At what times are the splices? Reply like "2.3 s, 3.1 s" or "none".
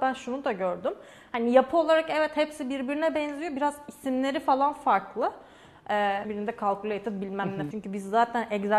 6.2 s, 7.7 s